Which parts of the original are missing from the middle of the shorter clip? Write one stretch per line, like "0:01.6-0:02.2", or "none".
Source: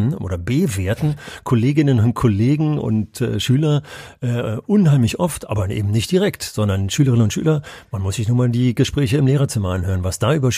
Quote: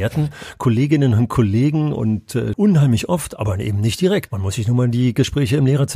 0:03.4-0:04.6
0:06.4-0:07.9